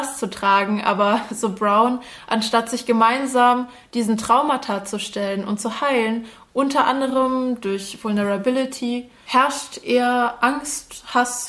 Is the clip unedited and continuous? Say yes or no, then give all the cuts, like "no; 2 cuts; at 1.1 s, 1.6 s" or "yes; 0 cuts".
yes; 0 cuts